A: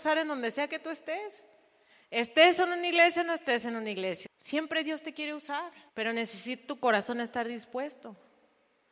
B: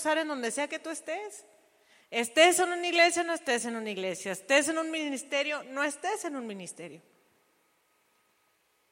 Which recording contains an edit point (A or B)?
A